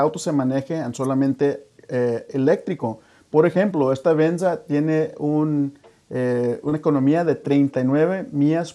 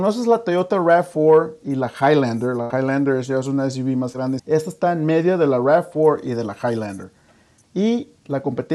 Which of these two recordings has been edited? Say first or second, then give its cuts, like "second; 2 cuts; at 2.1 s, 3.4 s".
second; 1 cut; at 4.4 s